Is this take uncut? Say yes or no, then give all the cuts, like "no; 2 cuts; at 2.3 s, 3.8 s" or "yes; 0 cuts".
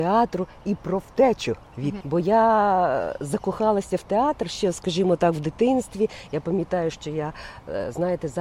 no; 1 cut; at 2.0 s